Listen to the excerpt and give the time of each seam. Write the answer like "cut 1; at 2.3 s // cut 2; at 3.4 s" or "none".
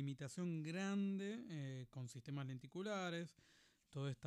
none